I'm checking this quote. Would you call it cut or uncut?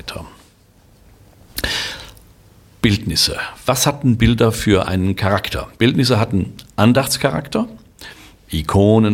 uncut